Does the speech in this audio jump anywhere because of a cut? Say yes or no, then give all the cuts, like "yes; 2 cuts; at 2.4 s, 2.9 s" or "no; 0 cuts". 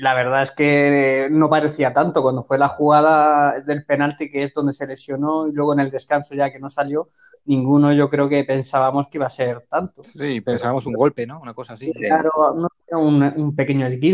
no; 0 cuts